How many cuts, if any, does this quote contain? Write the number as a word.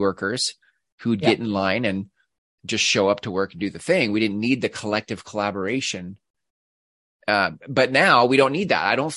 zero